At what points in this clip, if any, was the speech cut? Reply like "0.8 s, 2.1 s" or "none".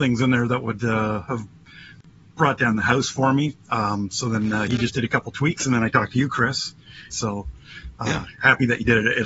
7.1 s